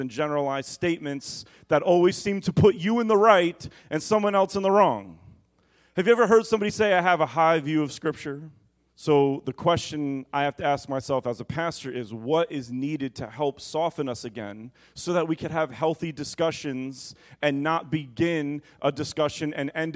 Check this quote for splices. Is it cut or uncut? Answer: cut